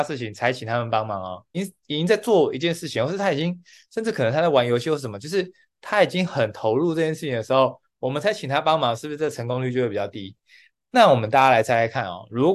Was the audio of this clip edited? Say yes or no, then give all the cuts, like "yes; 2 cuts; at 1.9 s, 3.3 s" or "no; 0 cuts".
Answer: yes; 1 cut; at 1.5 s